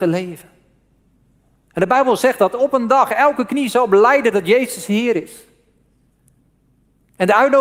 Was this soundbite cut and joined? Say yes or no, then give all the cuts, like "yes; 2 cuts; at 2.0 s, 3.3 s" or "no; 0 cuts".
no; 0 cuts